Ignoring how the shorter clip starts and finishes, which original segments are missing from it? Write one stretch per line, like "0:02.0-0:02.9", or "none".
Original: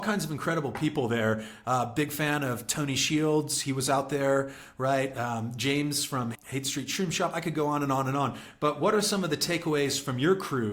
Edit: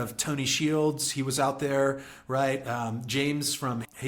none